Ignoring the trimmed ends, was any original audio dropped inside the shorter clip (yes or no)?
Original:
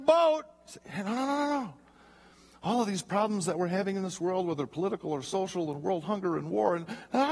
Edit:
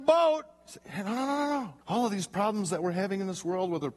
yes